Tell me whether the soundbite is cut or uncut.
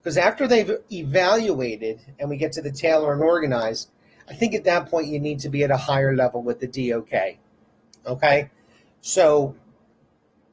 uncut